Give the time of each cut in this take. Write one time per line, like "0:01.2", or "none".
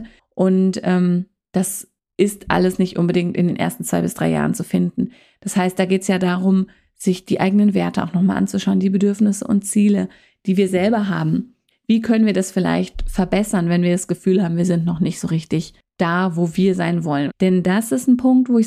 0:11.7
0:17.3